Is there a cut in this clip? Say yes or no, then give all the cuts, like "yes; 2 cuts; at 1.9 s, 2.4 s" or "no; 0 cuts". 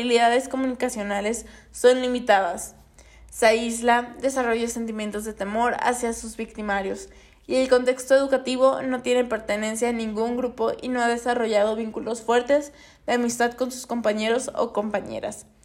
no; 0 cuts